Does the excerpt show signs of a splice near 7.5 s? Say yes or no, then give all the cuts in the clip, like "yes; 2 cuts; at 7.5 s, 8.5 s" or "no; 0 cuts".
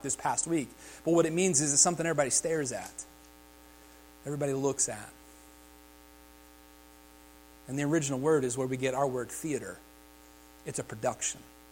no; 0 cuts